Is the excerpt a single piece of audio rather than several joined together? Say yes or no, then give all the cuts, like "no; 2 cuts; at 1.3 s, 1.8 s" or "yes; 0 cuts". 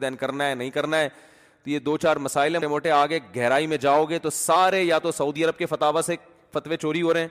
no; 1 cut; at 2.6 s